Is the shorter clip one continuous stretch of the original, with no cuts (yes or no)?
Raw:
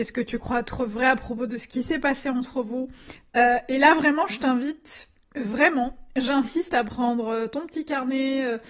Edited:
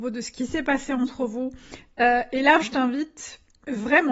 no